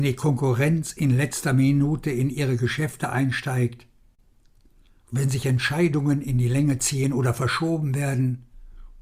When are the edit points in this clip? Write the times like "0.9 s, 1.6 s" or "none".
none